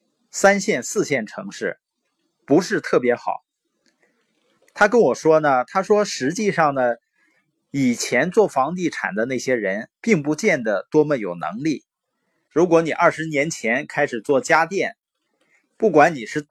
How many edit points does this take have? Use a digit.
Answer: 1